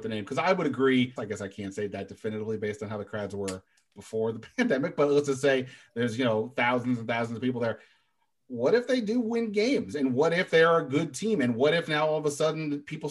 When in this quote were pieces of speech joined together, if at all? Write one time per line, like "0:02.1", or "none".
0:01.2